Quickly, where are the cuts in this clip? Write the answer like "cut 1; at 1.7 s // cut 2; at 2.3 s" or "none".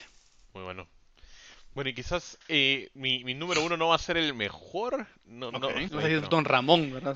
cut 1; at 5.9 s